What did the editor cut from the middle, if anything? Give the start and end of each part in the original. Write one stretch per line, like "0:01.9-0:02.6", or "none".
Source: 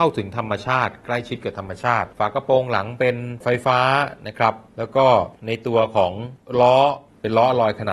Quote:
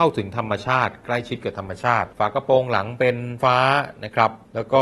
0:03.4-0:03.6

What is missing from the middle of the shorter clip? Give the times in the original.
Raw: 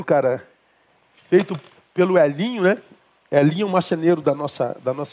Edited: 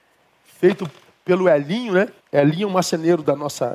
0:02.9-0:03.2

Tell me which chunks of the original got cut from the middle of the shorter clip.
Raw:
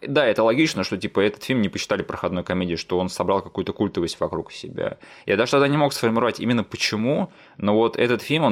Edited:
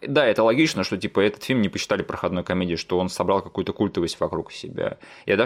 none

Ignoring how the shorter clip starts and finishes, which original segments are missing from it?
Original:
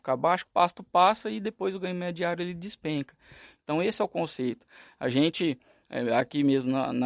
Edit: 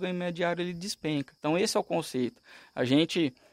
0:03.2-0:03.6

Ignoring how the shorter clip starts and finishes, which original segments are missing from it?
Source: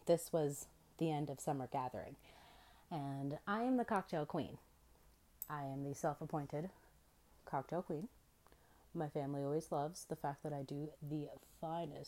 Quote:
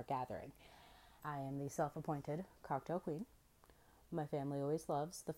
0:02.9-0:05.5
0:06.8-0:07.4

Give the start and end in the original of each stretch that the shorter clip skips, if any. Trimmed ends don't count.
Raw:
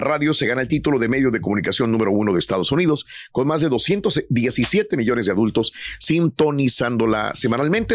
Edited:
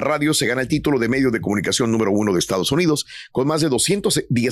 none

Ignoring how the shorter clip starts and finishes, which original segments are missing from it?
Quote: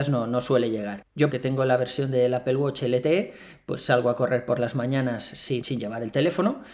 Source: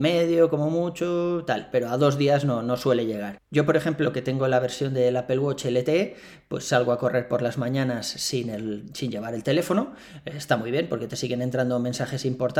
0:03.7-0:04.1
0:08.4-0:08.9

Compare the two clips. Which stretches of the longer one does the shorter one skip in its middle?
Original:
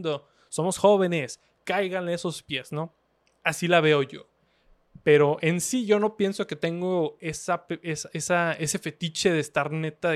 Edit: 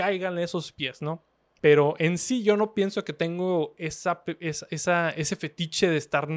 0:03.3-0:05.0

